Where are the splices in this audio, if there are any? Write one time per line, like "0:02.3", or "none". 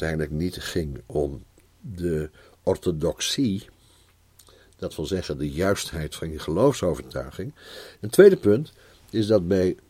0:07.9